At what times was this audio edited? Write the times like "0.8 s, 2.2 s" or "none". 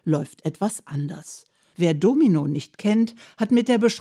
1.7 s